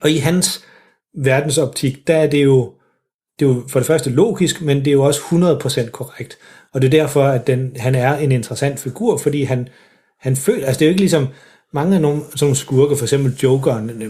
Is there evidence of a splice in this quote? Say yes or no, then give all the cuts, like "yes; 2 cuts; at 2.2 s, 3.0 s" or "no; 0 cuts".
no; 0 cuts